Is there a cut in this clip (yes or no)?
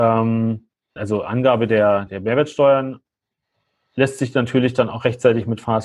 yes